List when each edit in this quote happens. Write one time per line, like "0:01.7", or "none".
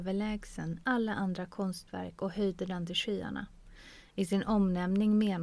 none